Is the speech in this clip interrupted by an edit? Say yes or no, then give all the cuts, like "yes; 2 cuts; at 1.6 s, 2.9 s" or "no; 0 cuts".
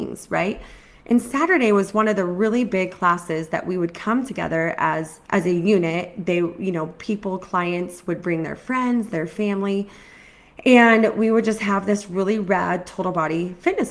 yes; 1 cut; at 5.3 s